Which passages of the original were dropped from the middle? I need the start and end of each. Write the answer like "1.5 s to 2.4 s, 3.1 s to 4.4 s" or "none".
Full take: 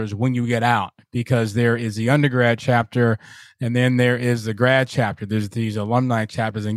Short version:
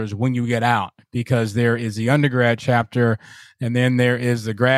none